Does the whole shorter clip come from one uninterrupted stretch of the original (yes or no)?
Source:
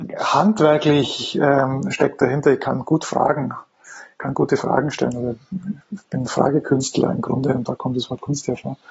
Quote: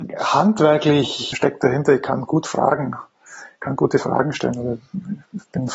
no